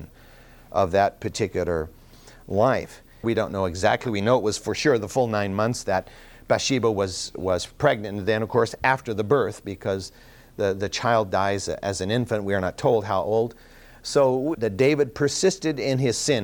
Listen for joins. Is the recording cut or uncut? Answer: cut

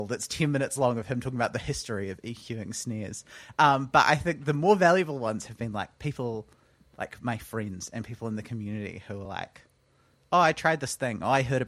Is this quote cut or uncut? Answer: uncut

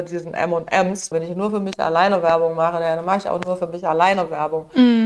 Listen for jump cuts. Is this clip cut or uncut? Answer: cut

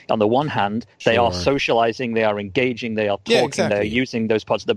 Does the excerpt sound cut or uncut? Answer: uncut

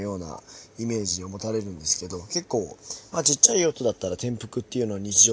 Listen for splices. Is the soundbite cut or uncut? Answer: uncut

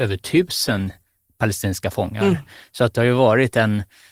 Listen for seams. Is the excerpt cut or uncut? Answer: uncut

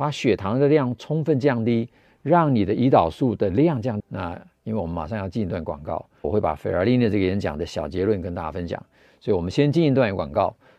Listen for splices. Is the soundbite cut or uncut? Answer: cut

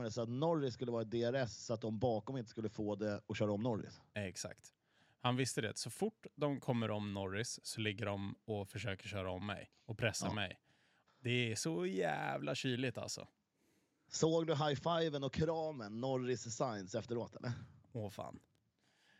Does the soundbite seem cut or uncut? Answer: cut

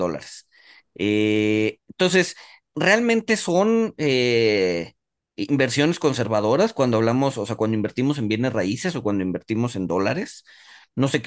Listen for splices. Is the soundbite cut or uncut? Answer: uncut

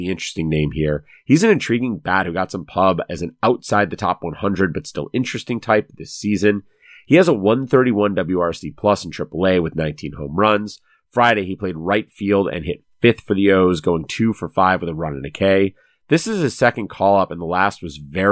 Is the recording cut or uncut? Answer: uncut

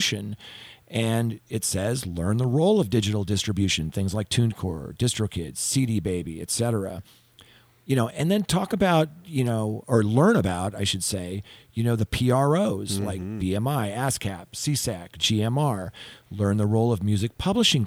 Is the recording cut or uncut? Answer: uncut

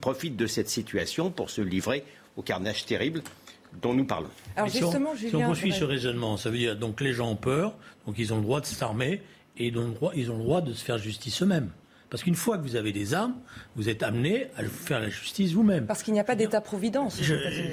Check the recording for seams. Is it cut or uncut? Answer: uncut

